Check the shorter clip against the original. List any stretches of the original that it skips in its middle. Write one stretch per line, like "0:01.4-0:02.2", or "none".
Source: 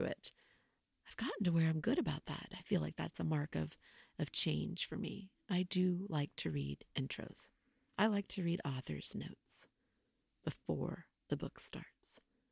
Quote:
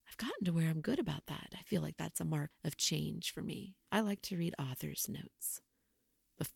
0:03.5-0:04.1
0:05.4-0:07.9